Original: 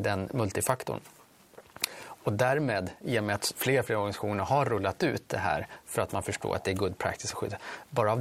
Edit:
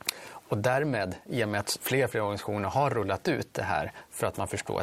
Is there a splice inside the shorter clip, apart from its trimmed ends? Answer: no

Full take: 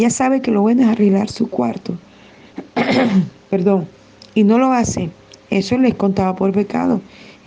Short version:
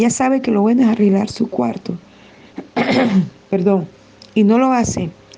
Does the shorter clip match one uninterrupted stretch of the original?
yes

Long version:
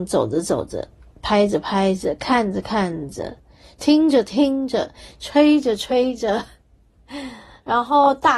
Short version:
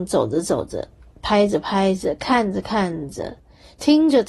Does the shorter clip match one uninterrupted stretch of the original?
yes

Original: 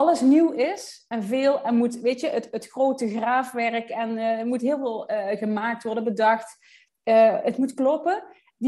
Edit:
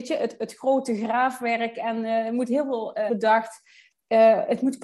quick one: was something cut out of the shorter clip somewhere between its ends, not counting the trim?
yes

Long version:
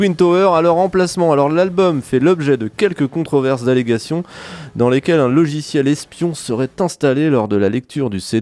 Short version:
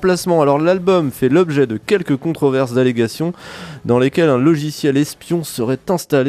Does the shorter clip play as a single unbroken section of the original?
yes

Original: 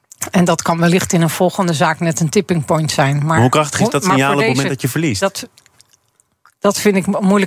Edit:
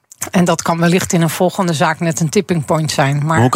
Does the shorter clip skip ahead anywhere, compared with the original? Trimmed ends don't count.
no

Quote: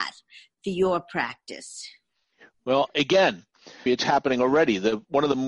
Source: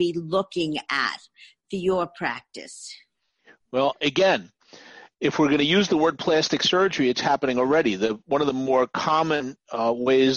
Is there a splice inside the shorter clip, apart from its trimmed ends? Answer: yes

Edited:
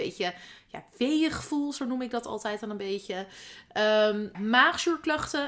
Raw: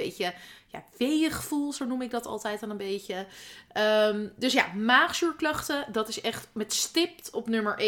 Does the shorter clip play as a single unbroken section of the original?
no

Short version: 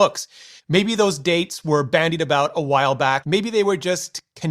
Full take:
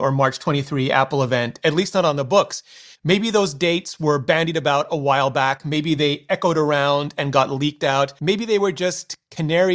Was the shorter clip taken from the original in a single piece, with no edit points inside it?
no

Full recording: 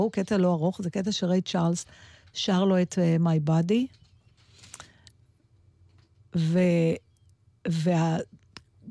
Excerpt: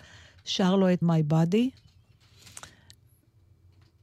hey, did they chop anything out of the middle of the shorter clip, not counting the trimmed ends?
yes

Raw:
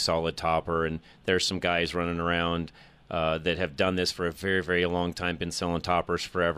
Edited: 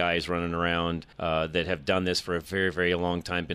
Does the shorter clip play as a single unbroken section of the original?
no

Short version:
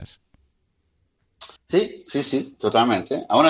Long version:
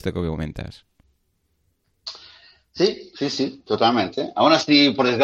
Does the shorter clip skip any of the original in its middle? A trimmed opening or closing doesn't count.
yes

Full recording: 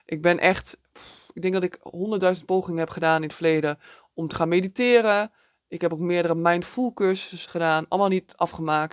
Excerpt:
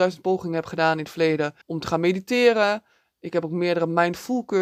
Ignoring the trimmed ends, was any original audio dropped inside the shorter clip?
yes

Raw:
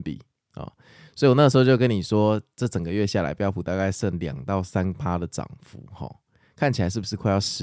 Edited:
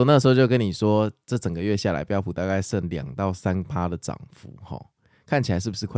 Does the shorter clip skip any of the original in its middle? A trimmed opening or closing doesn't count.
no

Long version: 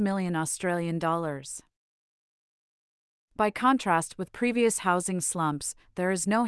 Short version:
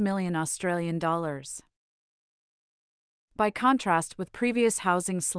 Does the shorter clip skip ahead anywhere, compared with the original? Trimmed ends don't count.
no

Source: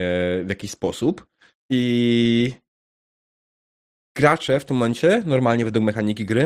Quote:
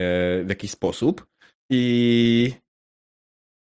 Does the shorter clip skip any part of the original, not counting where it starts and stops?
no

